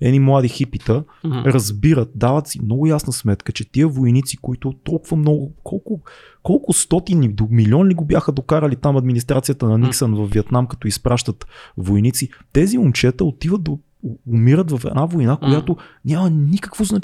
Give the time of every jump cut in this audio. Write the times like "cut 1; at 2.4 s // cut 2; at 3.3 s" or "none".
none